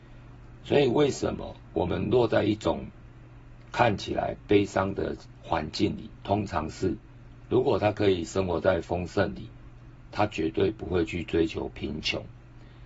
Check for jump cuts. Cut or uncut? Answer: cut